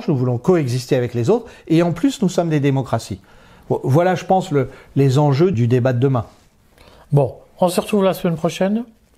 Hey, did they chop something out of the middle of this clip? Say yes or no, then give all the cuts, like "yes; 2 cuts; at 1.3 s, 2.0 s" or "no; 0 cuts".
yes; 1 cut; at 5.5 s